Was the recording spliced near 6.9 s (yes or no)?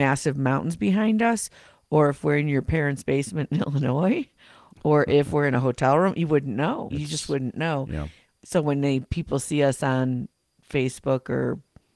yes